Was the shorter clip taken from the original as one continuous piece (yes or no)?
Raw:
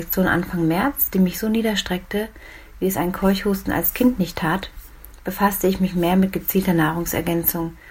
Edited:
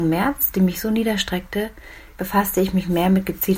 no